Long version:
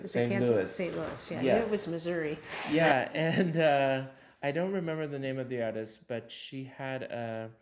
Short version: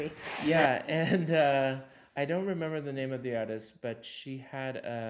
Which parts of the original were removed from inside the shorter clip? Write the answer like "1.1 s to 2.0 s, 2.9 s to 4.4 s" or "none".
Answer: none